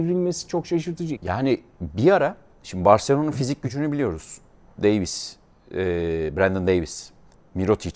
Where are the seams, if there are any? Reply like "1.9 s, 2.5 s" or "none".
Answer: 1.2 s